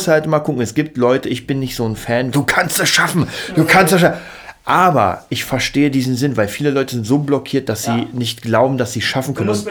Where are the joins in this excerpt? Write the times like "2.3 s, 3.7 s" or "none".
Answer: 2.3 s